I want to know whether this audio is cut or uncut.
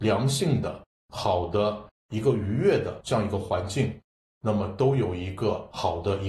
uncut